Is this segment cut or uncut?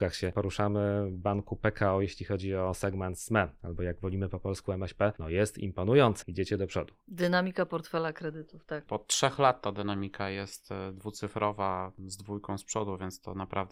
cut